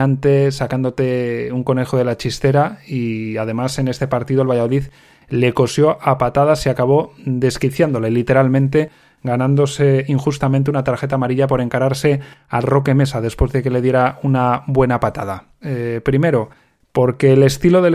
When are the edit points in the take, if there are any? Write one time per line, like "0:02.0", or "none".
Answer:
0:15.6